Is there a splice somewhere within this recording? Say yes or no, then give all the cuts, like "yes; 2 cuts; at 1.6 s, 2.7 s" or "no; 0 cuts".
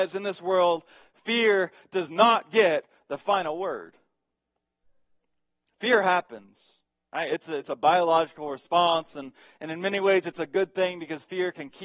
no; 0 cuts